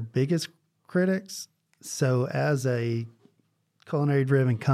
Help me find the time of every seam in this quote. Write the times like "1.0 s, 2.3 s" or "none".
none